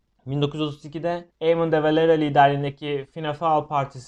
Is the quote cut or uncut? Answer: cut